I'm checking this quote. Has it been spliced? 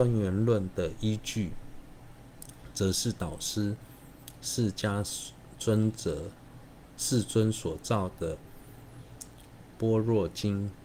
no; 0 cuts

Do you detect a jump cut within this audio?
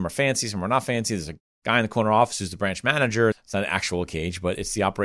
yes; 1 cut; at 3.3 s

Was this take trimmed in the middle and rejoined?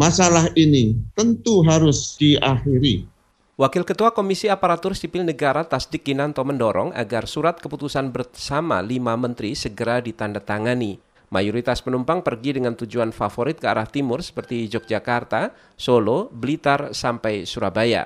yes; 1 cut; at 11.1 s

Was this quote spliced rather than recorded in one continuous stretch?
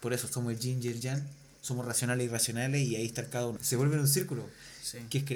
yes; 1 cut; at 3.6 s

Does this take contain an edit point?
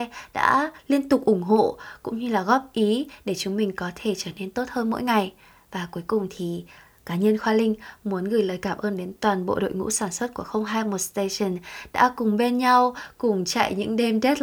no; 0 cuts

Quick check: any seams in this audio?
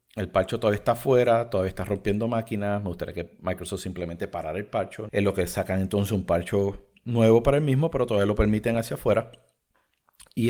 yes; 1 cut; at 5.1 s

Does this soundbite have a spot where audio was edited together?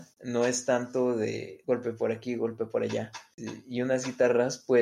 no; 0 cuts

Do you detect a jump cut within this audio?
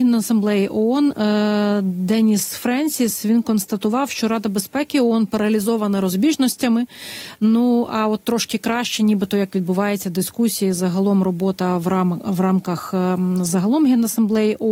no; 0 cuts

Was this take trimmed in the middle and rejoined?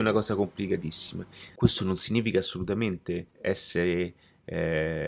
yes; 2 cuts; at 1.5 s, 3.3 s

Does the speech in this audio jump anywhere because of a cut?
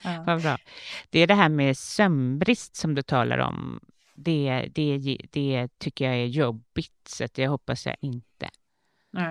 no; 0 cuts

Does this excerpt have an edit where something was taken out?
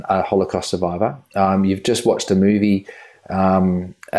no; 0 cuts

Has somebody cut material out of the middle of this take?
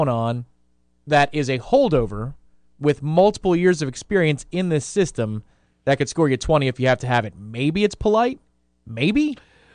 no; 0 cuts

